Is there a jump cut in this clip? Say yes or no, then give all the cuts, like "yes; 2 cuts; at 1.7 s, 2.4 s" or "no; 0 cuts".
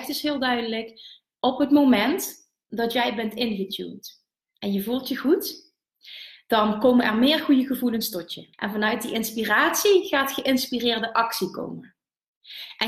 yes; 1 cut; at 8.5 s